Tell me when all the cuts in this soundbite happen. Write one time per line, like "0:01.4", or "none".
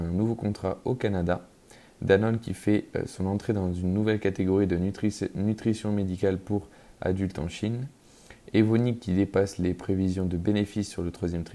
none